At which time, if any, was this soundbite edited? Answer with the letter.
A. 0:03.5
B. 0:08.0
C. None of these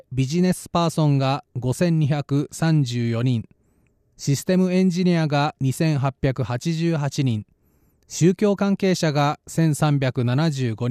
C